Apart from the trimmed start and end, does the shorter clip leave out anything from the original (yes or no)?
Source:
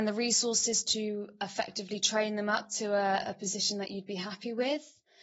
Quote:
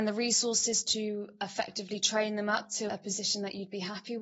yes